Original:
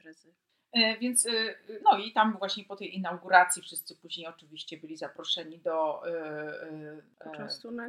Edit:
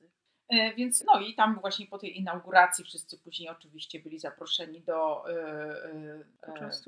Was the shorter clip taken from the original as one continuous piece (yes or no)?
no